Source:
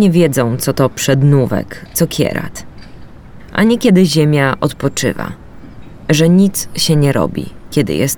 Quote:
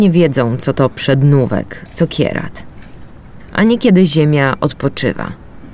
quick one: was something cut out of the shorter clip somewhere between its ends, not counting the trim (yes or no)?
no